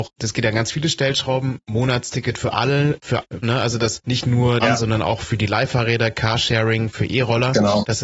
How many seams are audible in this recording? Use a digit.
2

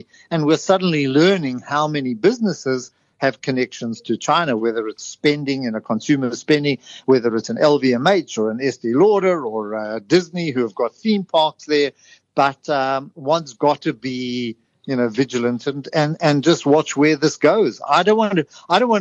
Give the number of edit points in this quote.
1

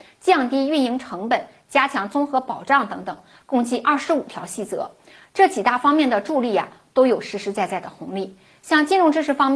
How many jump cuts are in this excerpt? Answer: 0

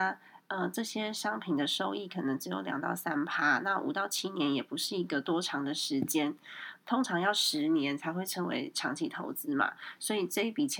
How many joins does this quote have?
0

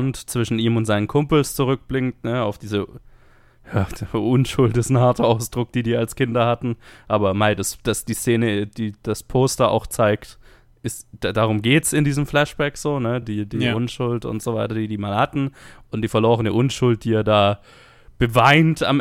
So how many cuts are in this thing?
0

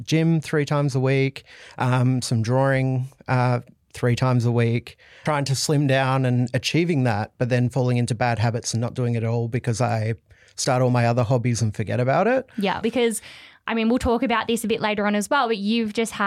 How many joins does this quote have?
2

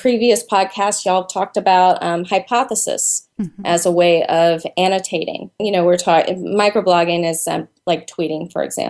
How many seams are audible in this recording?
1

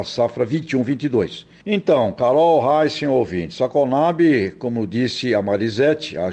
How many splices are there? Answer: 1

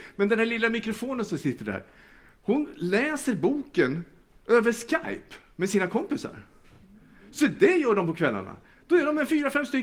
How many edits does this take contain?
0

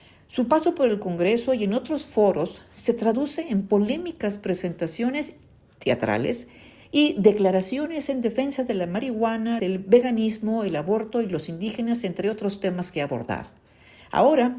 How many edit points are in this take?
1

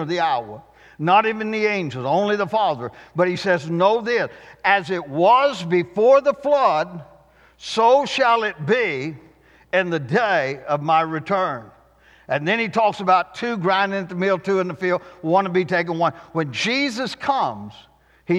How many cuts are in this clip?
0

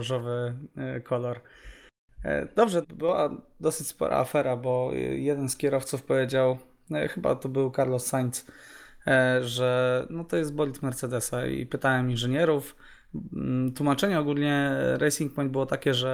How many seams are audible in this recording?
1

